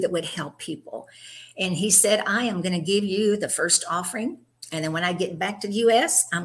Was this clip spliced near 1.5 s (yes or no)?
no